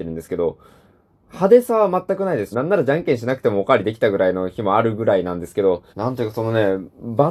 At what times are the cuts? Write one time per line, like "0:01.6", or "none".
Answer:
0:02.5
0:05.9